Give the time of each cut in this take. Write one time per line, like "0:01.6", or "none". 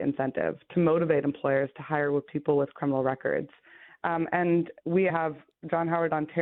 0:03.9
0:05.1